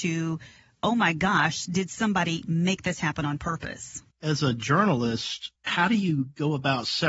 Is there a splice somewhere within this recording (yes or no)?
yes